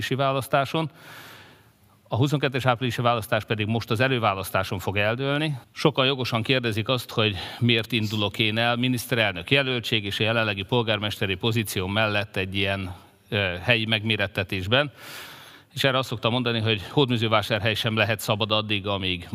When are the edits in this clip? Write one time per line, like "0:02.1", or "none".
0:05.6